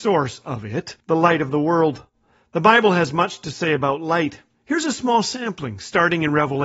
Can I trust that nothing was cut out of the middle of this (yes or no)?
no